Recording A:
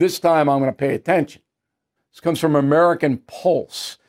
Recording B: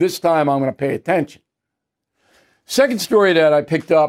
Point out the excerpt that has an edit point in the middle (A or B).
A